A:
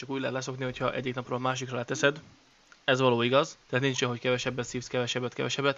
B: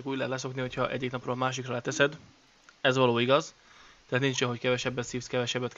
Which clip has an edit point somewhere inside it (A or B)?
A